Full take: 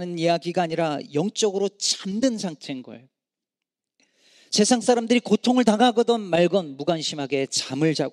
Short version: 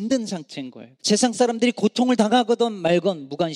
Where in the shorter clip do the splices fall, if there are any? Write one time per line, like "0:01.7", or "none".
0:01.0